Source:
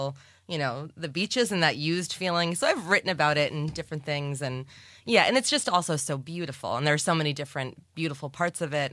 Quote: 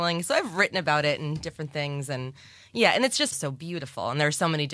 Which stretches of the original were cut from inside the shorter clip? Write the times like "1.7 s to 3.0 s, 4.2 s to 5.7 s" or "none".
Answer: 5.6 s to 6.0 s